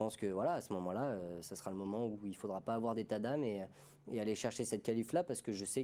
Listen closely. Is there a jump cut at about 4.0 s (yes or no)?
no